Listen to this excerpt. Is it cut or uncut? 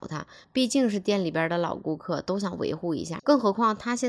cut